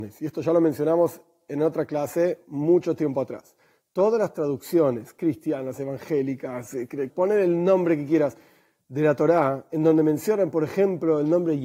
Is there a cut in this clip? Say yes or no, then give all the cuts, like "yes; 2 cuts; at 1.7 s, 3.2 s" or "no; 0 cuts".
yes; 1 cut; at 7.1 s